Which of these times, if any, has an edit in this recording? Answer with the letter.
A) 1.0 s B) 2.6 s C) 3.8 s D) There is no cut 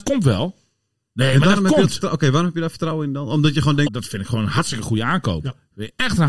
C